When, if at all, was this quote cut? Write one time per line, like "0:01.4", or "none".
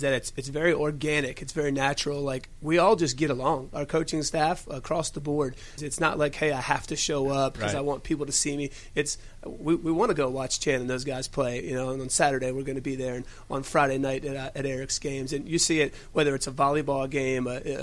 0:05.8